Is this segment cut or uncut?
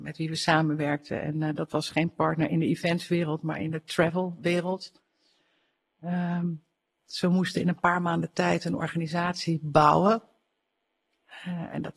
uncut